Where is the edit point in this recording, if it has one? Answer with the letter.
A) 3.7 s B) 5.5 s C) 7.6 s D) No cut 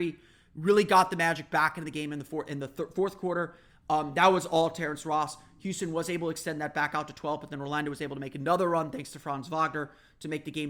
A